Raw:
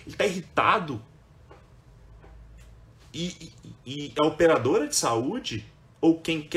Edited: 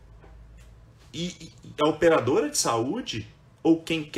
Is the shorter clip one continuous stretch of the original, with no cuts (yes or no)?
no